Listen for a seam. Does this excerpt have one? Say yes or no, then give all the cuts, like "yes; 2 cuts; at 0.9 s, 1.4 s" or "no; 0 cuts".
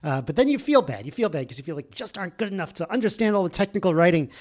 no; 0 cuts